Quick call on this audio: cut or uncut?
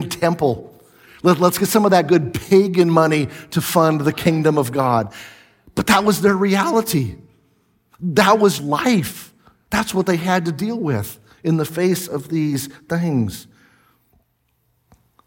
cut